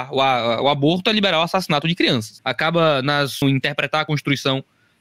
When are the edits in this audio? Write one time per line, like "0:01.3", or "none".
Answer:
0:02.4
0:03.4